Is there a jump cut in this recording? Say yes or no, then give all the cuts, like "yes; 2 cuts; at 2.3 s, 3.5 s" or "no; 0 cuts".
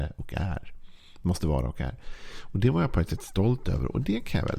no; 0 cuts